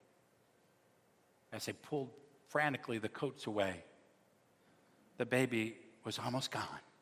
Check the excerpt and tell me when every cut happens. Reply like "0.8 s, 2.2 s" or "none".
none